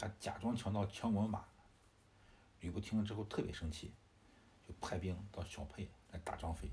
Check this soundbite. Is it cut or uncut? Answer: uncut